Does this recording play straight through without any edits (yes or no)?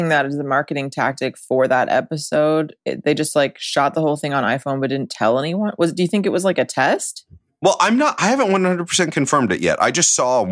yes